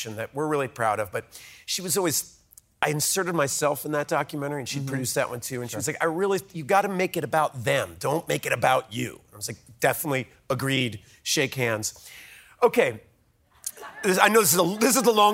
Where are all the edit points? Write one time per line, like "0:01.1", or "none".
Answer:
none